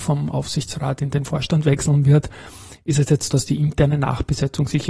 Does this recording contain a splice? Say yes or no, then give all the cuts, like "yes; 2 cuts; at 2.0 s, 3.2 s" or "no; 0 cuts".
yes; 1 cut; at 3.3 s